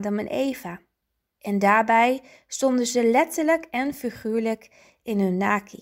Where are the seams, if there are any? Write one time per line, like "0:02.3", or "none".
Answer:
0:01.4